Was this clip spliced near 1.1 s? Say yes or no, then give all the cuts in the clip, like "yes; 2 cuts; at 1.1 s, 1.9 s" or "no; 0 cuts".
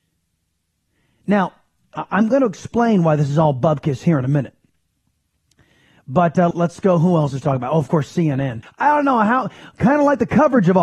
no; 2 cuts; at 6.5 s, 8.6 s